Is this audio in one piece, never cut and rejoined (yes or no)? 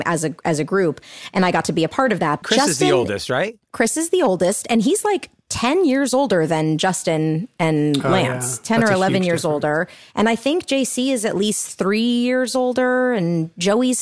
no